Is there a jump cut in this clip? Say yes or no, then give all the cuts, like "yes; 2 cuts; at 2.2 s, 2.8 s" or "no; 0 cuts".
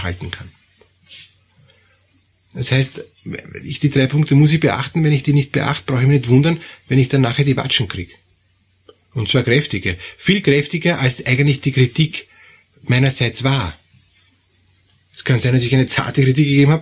no; 0 cuts